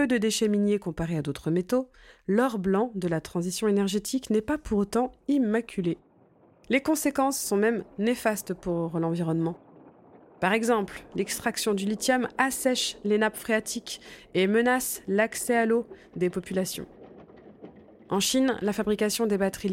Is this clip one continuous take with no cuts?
no; 1 cut; at 11.1 s

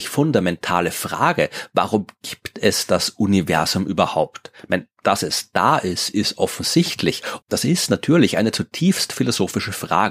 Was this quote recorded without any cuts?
no; 1 cut; at 7.4 s

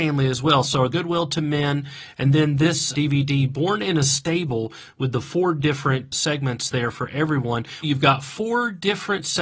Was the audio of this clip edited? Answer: yes; 2 cuts; at 0.9 s, 7.8 s

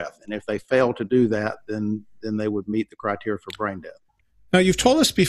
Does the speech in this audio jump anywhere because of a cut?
no; 0 cuts

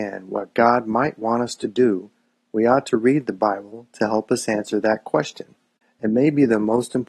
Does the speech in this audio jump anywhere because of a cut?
no; 0 cuts

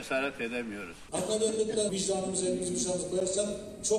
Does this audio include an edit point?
yes; 1 cut; at 1.9 s

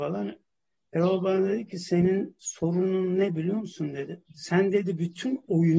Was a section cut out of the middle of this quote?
yes; 1 cut; at 4.3 s

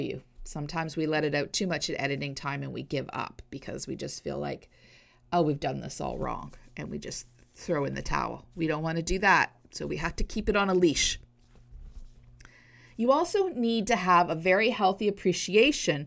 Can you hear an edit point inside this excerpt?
no; 0 cuts

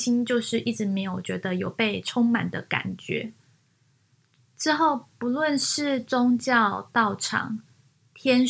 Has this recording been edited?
yes; 1 cut; at 4.4 s

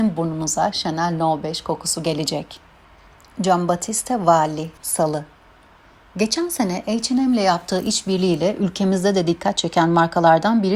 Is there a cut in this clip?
yes; 1 cut; at 4.8 s

